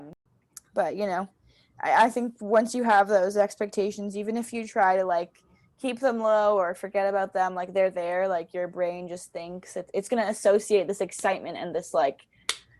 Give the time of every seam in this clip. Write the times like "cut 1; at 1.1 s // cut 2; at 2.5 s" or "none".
none